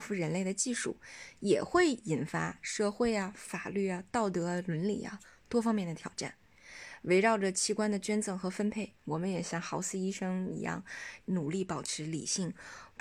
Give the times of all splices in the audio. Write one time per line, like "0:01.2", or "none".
0:11.2